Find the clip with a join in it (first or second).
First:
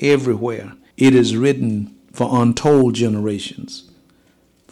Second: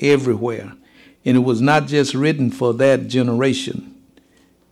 first